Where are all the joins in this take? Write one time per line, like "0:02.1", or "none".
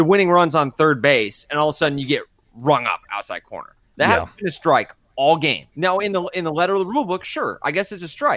0:05.7

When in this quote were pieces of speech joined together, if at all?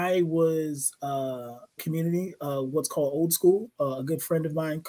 0:01.8

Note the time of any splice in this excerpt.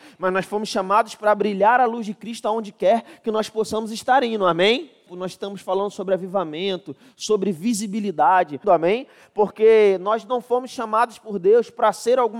0:05.1
0:08.6

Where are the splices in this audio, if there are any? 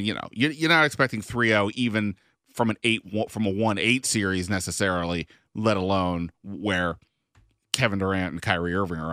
none

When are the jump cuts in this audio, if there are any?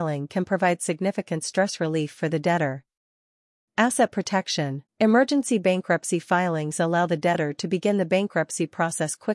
0:04.9

